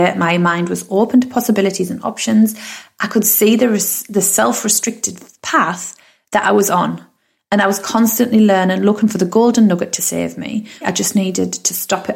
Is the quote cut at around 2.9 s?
no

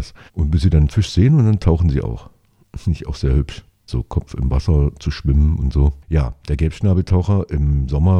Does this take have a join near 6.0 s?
yes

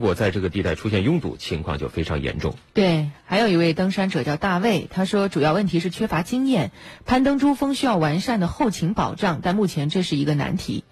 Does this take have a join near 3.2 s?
no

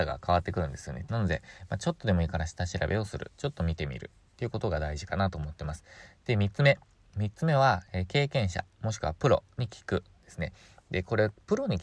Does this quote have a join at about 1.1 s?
yes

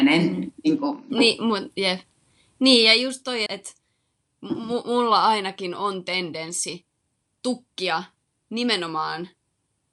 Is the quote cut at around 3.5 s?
yes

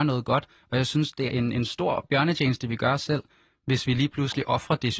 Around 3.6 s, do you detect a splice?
no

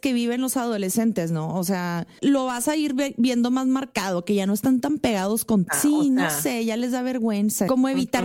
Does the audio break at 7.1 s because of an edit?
no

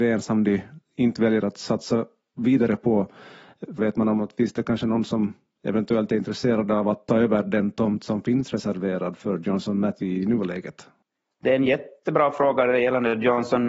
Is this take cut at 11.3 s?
no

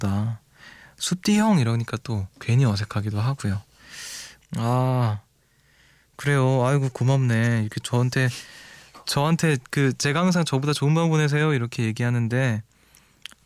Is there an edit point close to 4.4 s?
yes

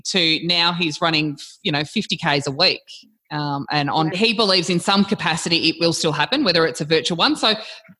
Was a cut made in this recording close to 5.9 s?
no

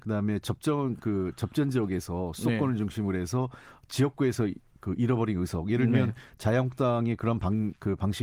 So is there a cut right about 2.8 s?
no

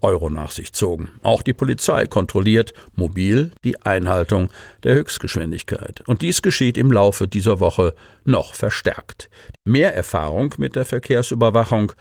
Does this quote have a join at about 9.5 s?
yes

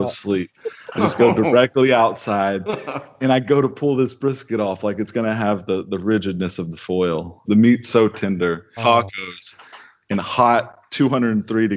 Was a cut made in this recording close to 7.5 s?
yes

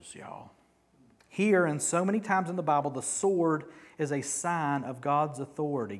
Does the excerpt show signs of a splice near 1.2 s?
yes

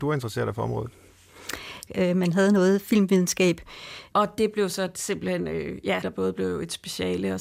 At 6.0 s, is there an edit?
yes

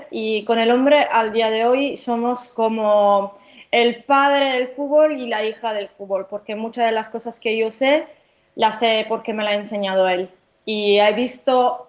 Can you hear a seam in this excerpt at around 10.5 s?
no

